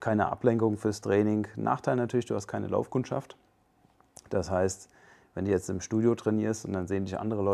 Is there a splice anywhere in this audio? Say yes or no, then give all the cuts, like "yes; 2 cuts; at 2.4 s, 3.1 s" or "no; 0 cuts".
no; 0 cuts